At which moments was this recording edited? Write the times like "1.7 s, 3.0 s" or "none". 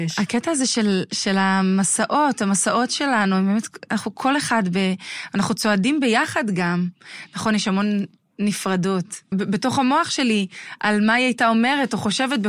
9.3 s

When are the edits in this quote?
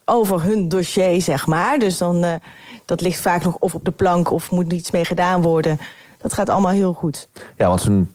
6.1 s

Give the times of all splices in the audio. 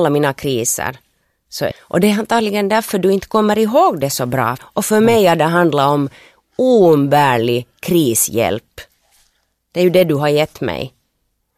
1.7 s, 4.6 s

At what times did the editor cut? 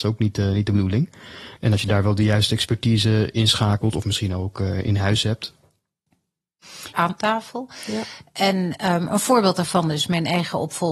1.6 s, 6.9 s

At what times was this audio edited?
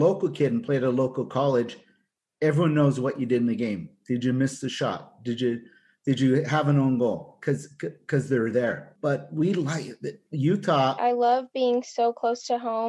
11.0 s

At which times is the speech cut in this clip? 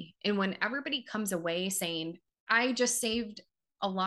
2.3 s

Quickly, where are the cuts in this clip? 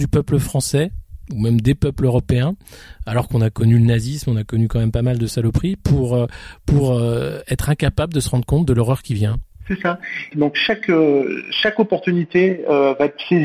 10.3 s

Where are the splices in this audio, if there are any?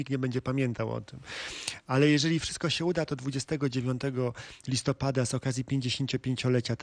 none

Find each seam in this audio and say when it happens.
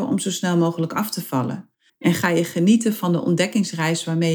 1.9 s

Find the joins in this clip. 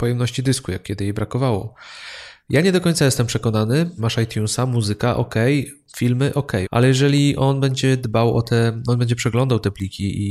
4.0 s, 6.6 s

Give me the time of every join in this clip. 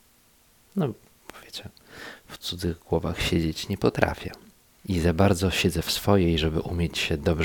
none

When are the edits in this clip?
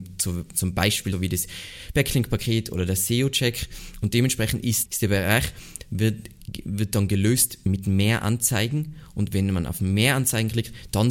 1.1 s, 4.9 s

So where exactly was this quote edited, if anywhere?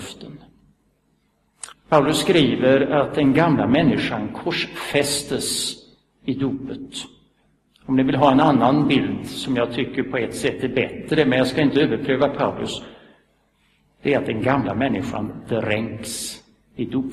1.7 s

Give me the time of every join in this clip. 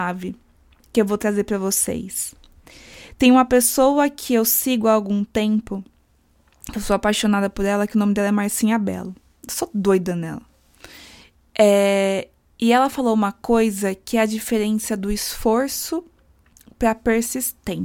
none

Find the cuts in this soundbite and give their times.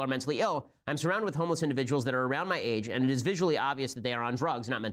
none

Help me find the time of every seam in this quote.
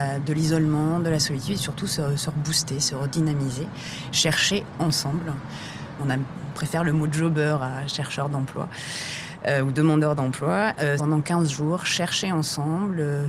6.0 s, 11.0 s

